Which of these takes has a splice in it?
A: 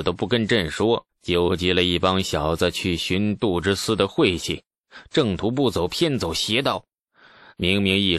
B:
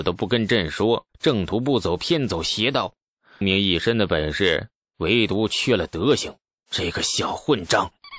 B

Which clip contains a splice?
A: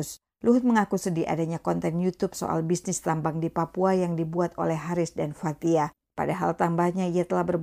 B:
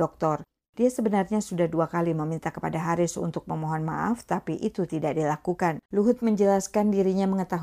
B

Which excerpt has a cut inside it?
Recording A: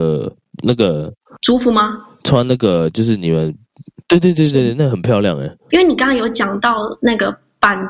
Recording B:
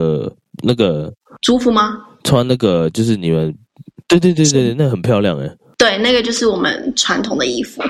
A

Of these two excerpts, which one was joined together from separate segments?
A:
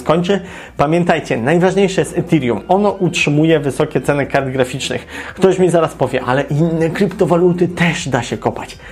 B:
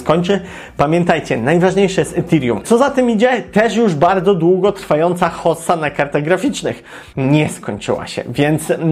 B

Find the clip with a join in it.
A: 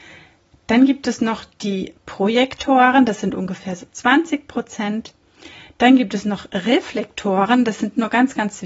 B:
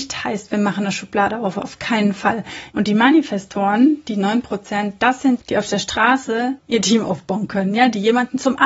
B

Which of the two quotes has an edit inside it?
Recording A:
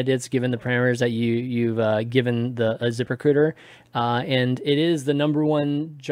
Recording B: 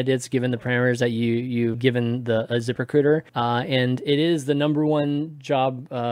B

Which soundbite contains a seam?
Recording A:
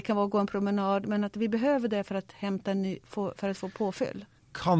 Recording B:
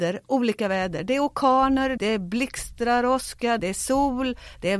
B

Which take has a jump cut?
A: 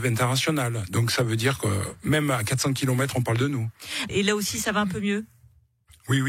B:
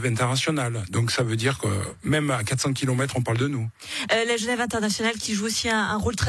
A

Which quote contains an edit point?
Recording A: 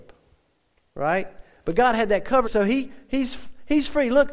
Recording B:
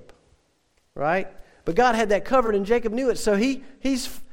A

